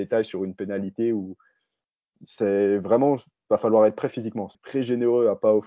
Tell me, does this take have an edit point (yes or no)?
yes